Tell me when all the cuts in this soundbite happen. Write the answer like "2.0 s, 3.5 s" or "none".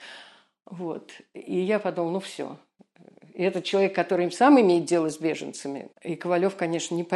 5.9 s